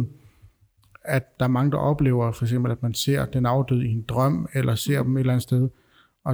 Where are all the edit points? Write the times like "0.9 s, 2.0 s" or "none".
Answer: none